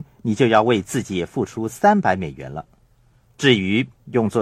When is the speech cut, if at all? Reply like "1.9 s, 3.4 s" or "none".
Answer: 3.3 s